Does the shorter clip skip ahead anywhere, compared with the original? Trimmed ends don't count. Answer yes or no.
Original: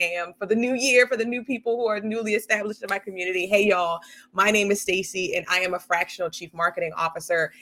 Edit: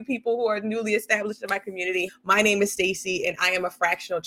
yes